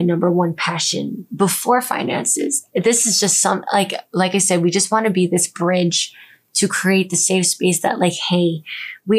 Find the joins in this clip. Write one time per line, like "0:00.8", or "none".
none